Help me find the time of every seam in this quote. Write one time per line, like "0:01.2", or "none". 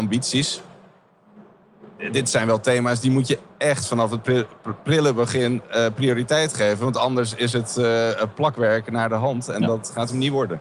none